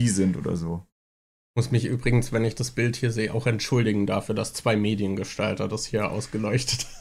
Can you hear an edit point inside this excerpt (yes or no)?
no